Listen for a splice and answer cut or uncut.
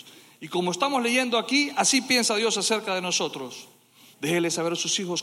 cut